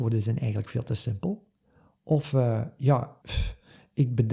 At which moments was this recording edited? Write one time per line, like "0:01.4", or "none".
0:03.2